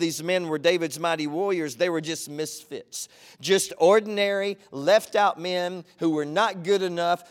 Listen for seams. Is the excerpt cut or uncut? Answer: uncut